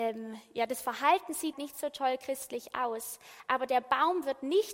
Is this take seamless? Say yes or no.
no